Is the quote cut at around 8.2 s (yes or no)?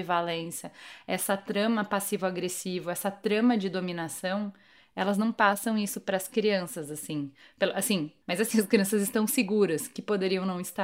yes